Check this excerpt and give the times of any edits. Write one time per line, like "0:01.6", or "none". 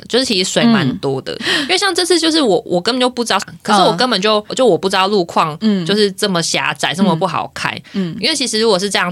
0:01.4
0:03.4
0:04.5